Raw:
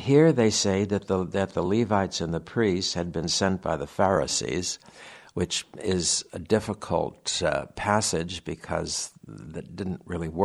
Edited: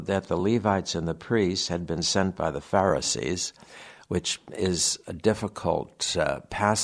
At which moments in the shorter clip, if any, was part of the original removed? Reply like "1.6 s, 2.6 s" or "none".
none